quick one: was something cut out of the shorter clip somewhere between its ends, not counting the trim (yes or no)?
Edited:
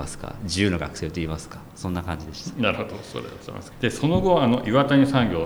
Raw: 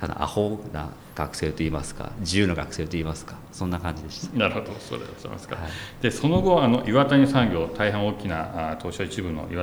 yes